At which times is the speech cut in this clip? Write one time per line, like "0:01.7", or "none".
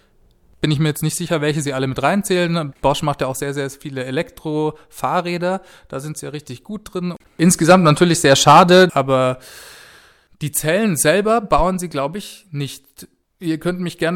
0:07.2
0:08.9